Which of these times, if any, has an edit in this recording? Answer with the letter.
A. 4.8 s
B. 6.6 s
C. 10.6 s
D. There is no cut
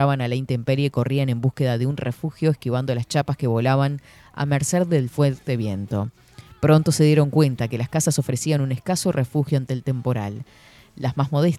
D